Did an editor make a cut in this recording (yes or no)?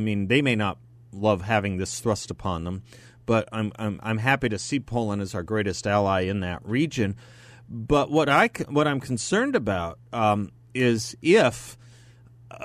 no